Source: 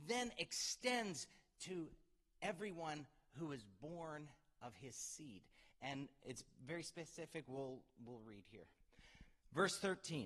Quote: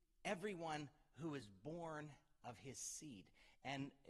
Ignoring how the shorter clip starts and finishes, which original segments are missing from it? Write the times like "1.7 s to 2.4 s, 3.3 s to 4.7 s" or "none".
none